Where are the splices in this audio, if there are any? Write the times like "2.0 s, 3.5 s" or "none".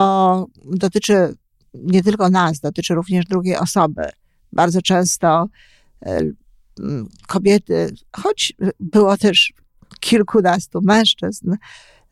none